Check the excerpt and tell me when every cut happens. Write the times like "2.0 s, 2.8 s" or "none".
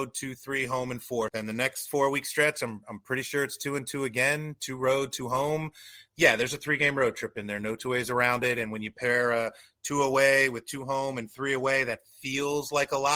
1.3 s